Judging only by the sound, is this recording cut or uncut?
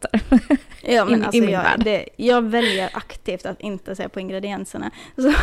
uncut